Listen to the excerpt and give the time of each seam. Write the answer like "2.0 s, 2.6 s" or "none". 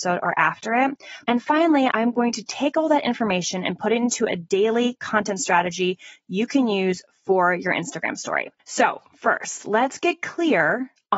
1.2 s